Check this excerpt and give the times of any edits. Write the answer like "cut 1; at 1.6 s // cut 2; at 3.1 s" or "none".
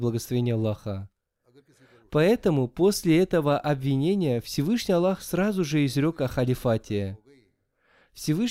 none